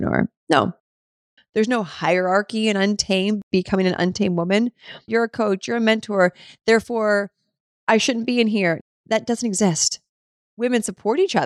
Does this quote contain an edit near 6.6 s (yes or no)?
no